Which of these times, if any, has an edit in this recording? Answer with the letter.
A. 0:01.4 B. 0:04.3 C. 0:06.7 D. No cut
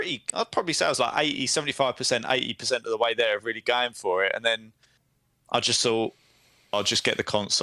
C